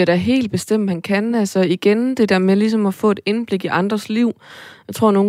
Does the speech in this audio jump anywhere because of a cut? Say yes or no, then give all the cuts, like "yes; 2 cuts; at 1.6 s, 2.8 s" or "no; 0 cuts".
no; 0 cuts